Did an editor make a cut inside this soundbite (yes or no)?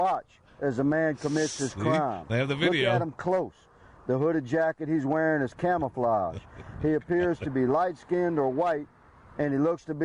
no